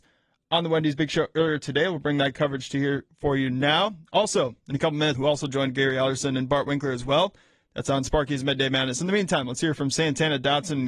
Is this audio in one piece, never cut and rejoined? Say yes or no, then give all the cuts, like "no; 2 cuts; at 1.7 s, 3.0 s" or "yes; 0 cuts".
no; 1 cut; at 5.1 s